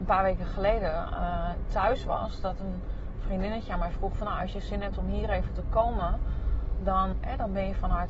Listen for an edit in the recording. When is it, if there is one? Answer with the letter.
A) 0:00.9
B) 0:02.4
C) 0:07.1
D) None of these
C